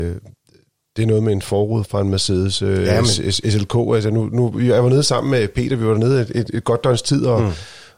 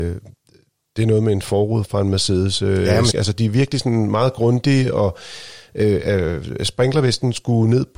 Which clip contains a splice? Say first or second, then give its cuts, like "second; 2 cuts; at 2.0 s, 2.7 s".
second; 1 cut; at 3.1 s